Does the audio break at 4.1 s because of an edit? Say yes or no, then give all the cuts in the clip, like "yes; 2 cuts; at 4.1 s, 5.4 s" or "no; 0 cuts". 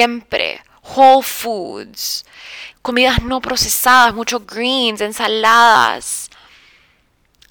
no; 1 cut; at 2.7 s